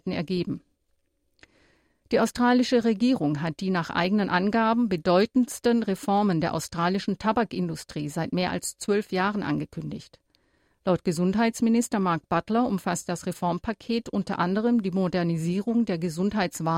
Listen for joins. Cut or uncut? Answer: uncut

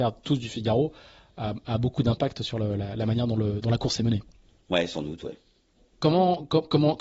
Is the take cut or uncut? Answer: uncut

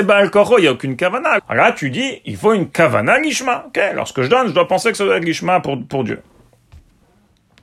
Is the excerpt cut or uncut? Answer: cut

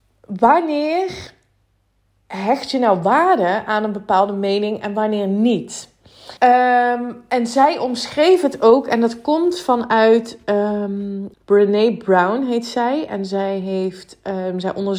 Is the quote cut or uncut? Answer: cut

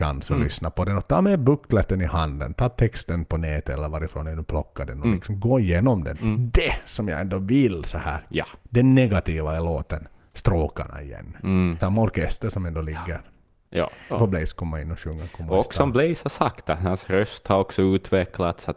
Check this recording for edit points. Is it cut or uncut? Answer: cut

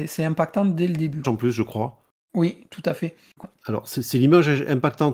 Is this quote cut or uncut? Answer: cut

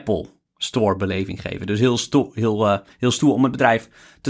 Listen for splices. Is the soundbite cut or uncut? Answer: uncut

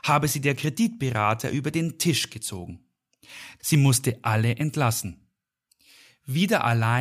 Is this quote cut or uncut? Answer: cut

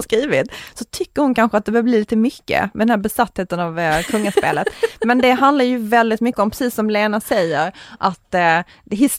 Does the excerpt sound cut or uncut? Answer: uncut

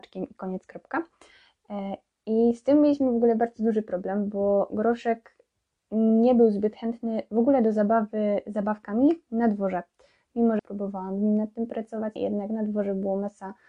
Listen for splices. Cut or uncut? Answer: cut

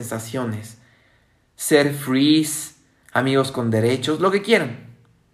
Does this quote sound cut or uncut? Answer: uncut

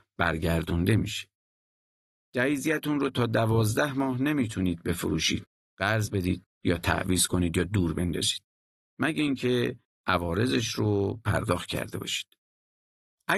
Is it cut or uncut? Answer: uncut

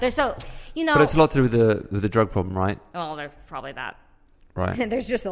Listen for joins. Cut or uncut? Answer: uncut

